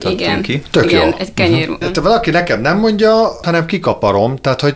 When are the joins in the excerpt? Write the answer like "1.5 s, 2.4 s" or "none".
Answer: 1.8 s, 3.4 s